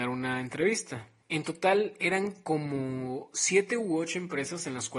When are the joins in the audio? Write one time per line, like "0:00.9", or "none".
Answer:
0:01.2